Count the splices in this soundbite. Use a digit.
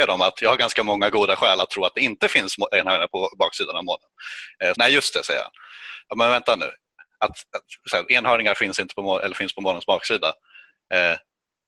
1